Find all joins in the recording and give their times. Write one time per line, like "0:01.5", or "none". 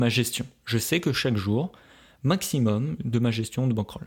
0:03.0